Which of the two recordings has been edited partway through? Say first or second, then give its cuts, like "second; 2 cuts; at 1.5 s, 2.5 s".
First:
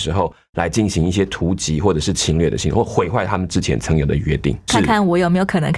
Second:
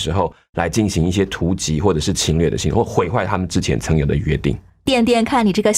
first; 1 cut; at 4.7 s